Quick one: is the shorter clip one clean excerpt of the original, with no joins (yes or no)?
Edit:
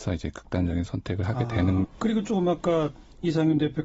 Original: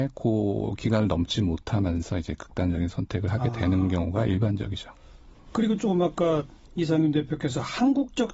no